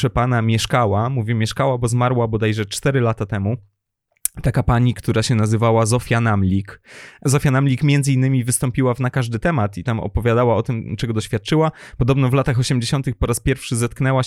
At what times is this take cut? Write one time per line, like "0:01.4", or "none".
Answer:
none

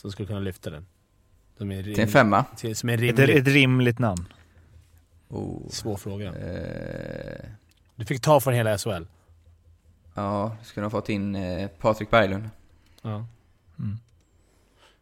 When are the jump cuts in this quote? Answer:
none

